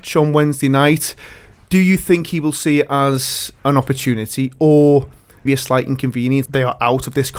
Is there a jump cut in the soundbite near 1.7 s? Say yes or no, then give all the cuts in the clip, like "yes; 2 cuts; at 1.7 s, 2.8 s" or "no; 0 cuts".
no; 2 cuts; at 5.5 s, 6.5 s